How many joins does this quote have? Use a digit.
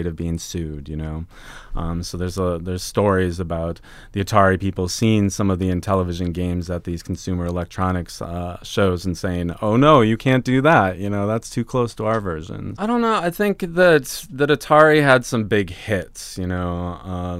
1